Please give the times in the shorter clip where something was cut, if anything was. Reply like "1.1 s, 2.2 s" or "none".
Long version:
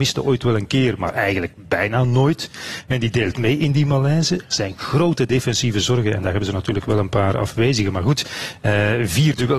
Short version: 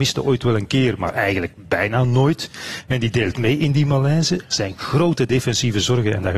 none